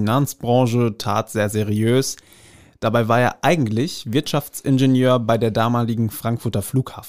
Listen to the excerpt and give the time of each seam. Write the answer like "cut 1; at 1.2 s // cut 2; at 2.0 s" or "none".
none